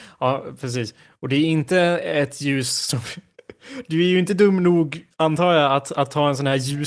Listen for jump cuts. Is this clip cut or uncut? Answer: uncut